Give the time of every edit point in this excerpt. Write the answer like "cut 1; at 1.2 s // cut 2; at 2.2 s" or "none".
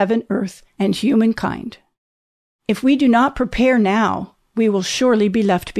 none